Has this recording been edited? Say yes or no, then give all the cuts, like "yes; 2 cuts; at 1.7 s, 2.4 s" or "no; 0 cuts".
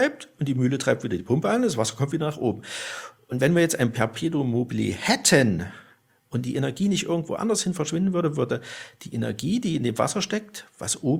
no; 0 cuts